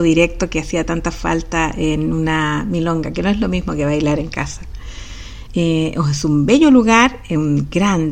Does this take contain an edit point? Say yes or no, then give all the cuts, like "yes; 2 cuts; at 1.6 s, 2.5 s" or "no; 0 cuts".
yes; 1 cut; at 5.5 s